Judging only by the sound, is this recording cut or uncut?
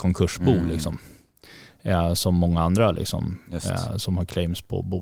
uncut